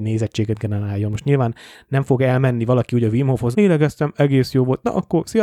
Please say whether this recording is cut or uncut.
cut